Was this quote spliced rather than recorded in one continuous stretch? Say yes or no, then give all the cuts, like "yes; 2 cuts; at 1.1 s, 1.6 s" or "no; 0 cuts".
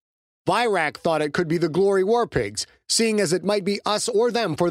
no; 0 cuts